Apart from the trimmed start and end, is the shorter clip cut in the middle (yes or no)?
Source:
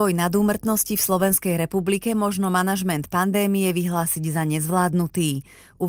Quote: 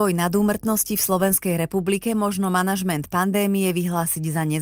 no